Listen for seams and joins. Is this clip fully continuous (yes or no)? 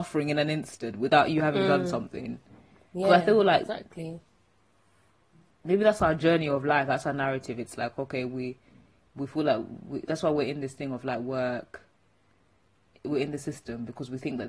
yes